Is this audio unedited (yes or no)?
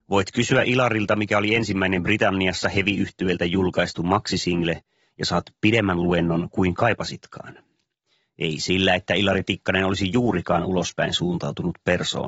yes